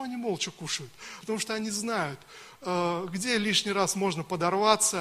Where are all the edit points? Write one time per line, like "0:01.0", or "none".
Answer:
0:01.2